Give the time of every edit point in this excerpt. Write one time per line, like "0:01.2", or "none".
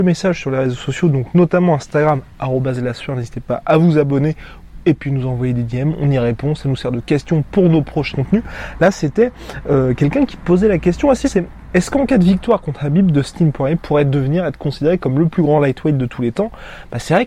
0:08.1
0:11.2